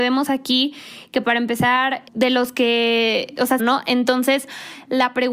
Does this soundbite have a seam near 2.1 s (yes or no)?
yes